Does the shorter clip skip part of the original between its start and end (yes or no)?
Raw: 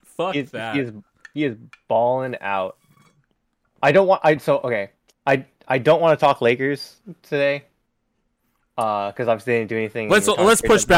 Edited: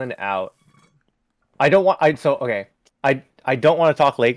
no